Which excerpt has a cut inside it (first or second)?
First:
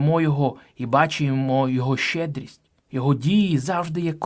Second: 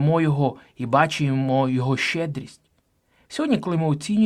first